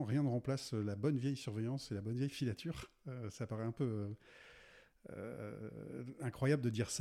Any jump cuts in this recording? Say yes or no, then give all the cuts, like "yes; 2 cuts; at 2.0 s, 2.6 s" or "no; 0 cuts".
no; 0 cuts